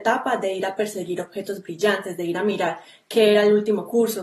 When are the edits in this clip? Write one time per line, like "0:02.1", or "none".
none